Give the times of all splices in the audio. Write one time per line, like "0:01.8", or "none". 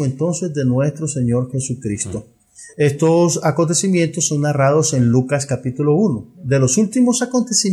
none